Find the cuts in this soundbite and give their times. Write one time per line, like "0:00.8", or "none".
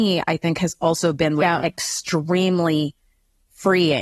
none